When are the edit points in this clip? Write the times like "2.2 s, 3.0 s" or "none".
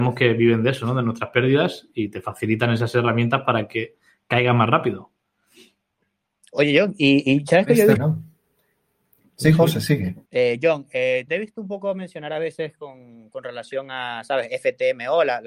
8.0 s, 10.3 s, 11.3 s